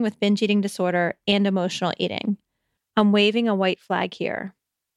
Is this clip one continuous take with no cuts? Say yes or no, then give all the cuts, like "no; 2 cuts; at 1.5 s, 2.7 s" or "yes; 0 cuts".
no; 1 cut; at 2.8 s